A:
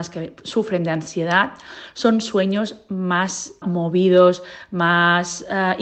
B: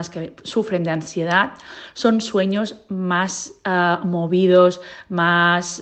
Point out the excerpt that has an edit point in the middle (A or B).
A